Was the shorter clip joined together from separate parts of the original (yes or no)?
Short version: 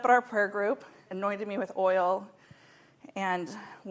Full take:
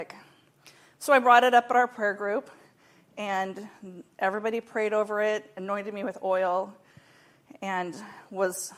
yes